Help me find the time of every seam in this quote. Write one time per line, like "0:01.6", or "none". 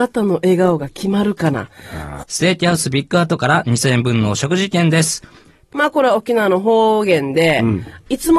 0:02.2
0:05.7